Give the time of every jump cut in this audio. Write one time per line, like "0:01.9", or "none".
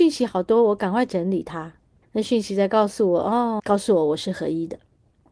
0:02.0
0:03.6